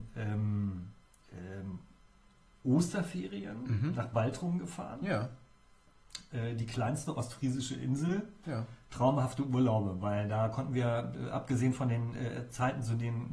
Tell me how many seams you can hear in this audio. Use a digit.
0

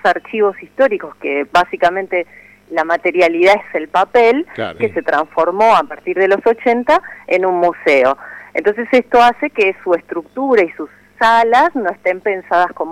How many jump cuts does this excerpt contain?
1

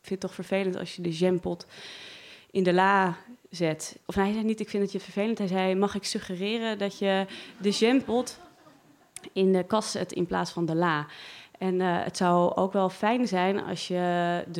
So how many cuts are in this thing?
1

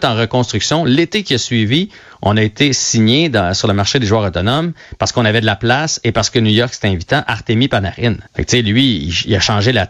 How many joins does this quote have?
1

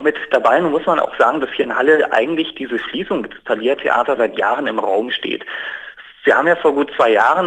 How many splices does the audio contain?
1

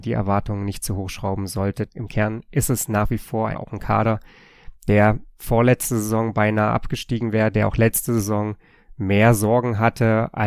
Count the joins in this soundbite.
2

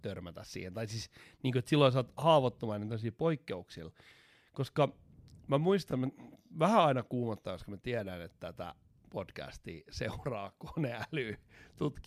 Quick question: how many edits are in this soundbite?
0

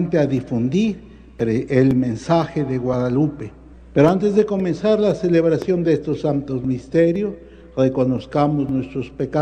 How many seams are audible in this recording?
1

